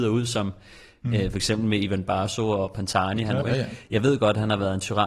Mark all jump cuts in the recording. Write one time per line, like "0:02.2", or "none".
0:03.4